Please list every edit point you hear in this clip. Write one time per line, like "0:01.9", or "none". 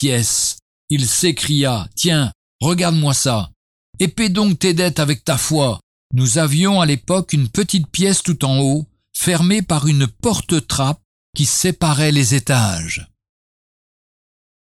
0:06.0

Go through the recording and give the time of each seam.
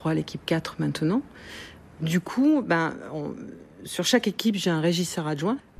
none

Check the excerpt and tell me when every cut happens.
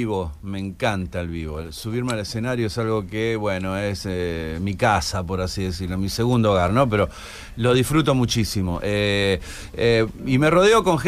none

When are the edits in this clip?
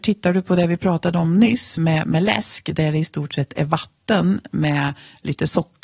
none

